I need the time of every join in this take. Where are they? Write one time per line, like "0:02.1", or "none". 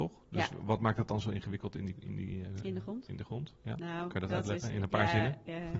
none